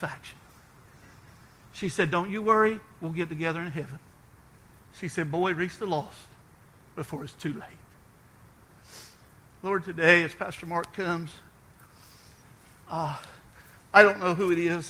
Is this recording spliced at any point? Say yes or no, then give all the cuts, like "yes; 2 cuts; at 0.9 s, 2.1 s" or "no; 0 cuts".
no; 0 cuts